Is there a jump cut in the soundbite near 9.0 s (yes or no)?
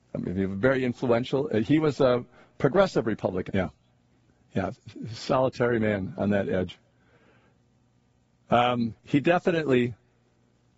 yes